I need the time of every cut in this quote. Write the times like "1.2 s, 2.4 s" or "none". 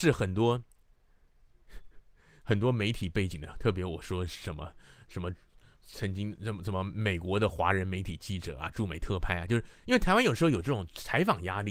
none